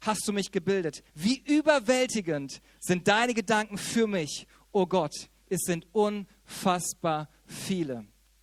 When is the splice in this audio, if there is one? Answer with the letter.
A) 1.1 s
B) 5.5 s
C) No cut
A